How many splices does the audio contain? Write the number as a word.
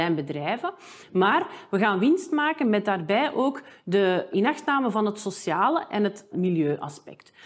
two